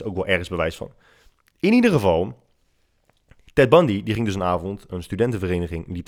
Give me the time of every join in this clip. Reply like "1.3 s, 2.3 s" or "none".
none